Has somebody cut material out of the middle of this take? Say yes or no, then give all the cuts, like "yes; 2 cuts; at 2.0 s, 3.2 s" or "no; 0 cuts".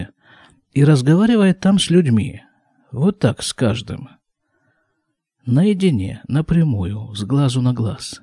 no; 0 cuts